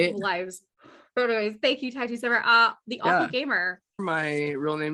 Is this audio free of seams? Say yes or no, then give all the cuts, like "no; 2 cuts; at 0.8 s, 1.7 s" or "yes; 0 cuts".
no; 1 cut; at 4.0 s